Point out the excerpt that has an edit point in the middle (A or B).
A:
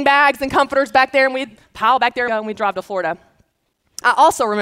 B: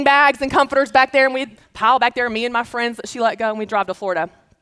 A